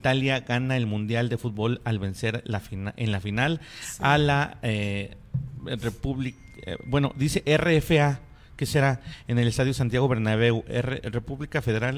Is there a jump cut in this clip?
no; 0 cuts

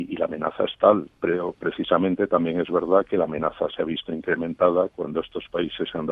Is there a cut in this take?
no; 0 cuts

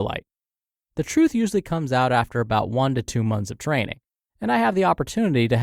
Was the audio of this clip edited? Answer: no; 0 cuts

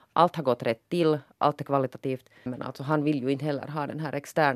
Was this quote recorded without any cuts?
no; 1 cut; at 2.5 s

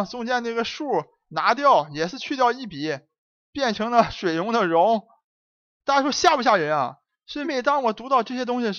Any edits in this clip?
yes; 1 cut; at 7.4 s

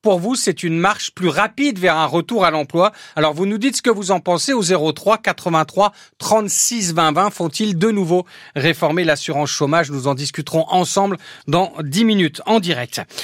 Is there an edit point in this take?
no; 0 cuts

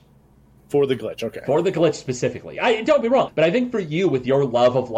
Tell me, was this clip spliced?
yes; 1 cut; at 3.3 s

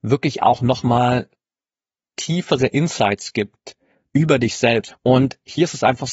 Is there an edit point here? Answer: yes; 1 cut; at 4.9 s

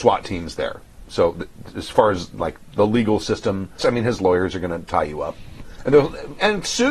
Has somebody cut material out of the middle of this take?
yes; 2 cuts; at 2.7 s, 3.8 s

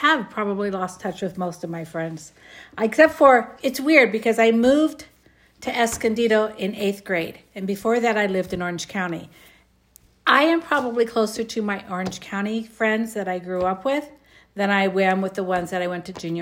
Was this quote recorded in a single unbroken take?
yes; 0 cuts

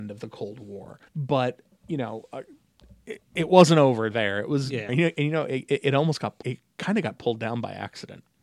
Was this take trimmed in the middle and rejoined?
yes; 3 cuts; at 1.1 s, 4.9 s, 6.4 s

